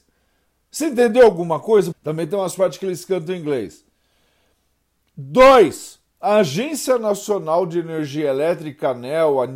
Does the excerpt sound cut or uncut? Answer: cut